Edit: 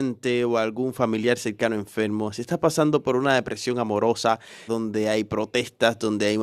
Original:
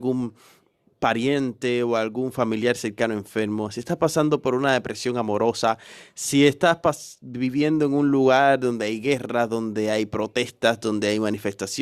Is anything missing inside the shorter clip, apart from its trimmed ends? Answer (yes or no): yes